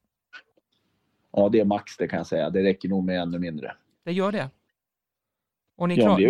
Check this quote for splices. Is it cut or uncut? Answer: uncut